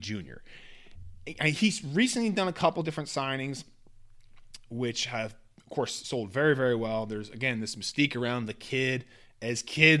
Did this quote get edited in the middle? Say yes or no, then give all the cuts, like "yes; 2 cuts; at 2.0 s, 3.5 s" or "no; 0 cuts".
no; 0 cuts